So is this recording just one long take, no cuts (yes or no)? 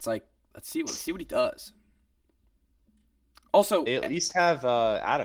yes